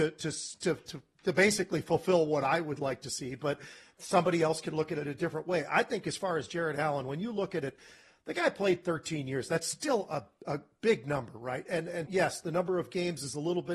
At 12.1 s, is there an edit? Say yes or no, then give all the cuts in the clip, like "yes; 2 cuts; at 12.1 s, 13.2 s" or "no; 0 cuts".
yes; 1 cut; at 12.1 s